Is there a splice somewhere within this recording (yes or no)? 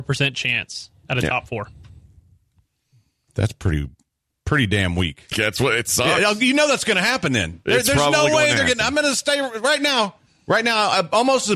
yes